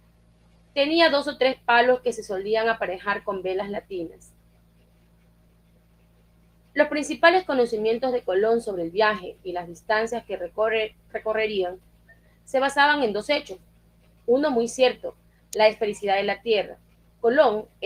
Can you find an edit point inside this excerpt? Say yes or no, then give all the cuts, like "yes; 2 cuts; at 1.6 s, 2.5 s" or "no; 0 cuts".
no; 0 cuts